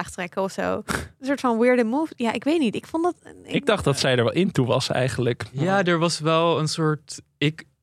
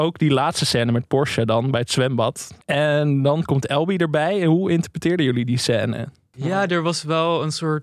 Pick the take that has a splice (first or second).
second